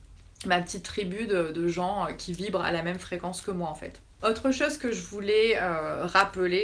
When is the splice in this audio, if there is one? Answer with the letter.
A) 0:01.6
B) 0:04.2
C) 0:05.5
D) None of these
B